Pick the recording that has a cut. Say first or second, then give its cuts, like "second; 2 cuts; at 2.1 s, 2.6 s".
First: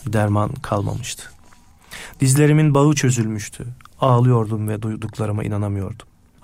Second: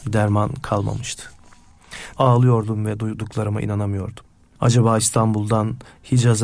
second; 1 cut; at 2.1 s